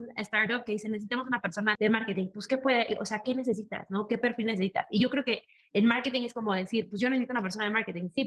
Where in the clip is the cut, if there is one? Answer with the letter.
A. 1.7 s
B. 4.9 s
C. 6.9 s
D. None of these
A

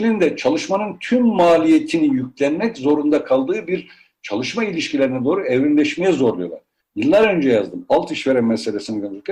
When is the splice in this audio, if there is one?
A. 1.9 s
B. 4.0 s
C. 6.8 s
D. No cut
C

